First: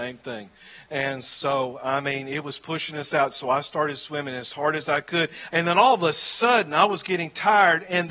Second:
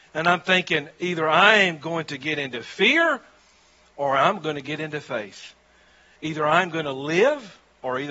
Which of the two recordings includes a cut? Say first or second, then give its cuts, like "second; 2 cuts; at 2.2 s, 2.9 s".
first; 1 cut; at 5.5 s